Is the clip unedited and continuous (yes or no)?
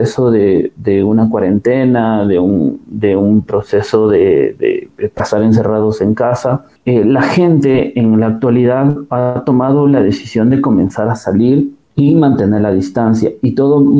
no